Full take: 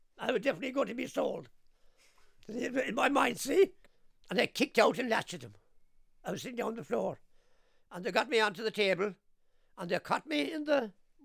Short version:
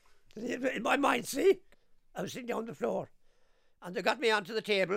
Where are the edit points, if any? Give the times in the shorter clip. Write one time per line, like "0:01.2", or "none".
0:02.0